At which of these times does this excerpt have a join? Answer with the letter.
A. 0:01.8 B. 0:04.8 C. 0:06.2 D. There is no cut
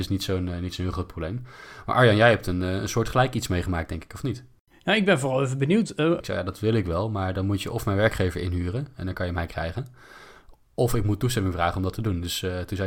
C